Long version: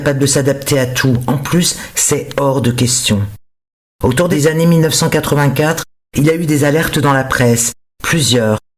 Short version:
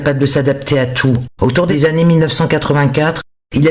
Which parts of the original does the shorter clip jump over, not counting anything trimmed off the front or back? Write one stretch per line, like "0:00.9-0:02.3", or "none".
0:01.3-0:03.9